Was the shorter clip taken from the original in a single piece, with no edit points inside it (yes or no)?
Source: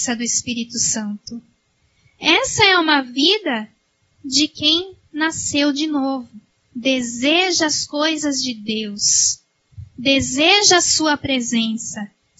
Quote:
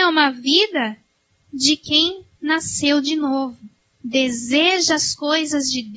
yes